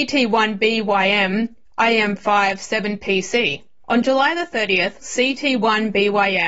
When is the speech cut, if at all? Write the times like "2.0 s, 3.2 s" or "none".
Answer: 3.8 s, 5.0 s